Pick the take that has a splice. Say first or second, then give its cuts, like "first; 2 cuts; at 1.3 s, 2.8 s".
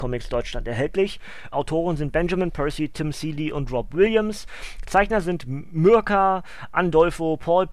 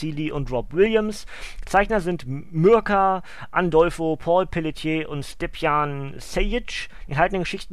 first; 1 cut; at 1.5 s